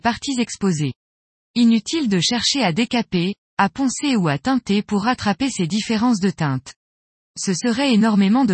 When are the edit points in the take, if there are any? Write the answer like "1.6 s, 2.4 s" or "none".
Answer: none

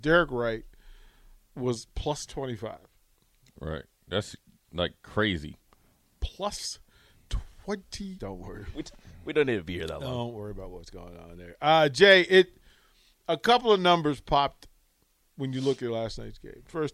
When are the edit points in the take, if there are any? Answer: 8.2 s

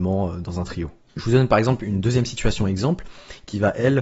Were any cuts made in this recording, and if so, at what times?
none

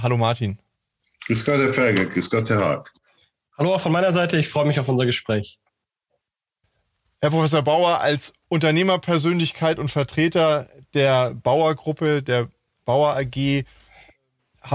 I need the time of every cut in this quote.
none

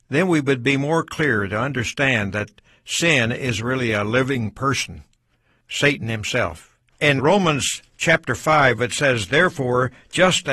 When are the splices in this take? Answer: 7.2 s, 8.8 s

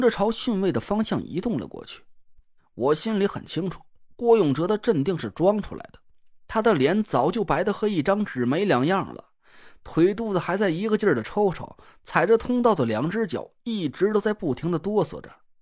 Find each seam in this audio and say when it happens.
2.6 s

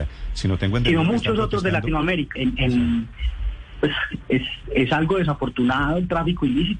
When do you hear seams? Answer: 2.4 s

